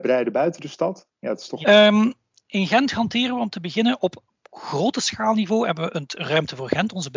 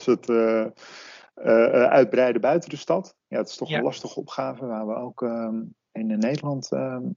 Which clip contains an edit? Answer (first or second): first